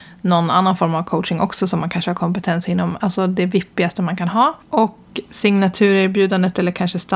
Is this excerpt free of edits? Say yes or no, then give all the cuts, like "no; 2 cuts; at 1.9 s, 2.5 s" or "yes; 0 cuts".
no; 1 cut; at 4.6 s